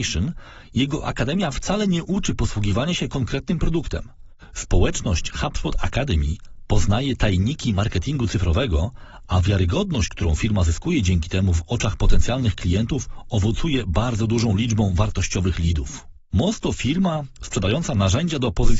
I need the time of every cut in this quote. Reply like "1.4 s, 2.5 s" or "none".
16.3 s